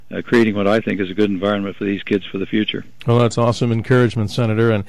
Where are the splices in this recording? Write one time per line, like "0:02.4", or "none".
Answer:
none